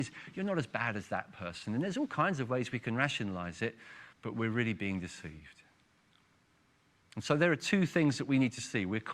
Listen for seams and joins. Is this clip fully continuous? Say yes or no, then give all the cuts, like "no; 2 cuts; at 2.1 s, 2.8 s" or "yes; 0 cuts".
no; 1 cut; at 4.1 s